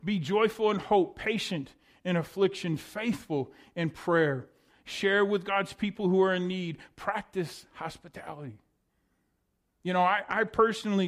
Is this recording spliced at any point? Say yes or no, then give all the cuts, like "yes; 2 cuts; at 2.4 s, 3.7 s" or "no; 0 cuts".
yes; 1 cut; at 9.7 s